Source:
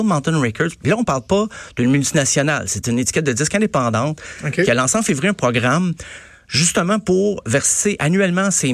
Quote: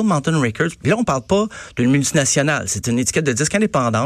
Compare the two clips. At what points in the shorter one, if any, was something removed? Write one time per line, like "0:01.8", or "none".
none